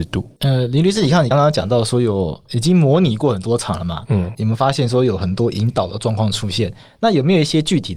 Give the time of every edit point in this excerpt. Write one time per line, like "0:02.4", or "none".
0:01.3
0:04.3

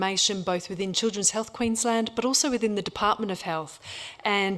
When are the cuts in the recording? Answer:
none

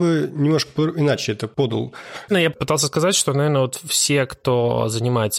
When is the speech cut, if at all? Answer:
0:02.3

